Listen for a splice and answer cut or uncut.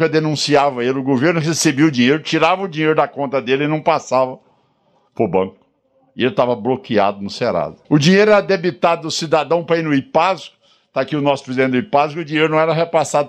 cut